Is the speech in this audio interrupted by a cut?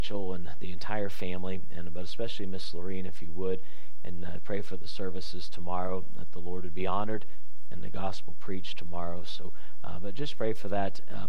no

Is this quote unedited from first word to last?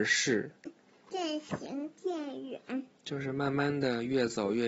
no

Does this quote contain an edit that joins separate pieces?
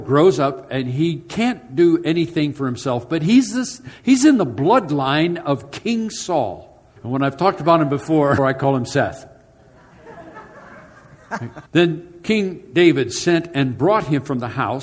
yes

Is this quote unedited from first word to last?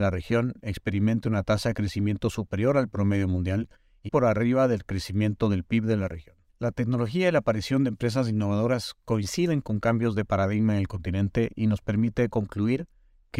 no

